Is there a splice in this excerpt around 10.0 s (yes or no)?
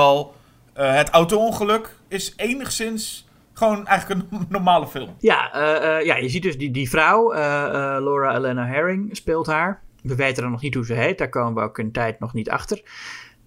no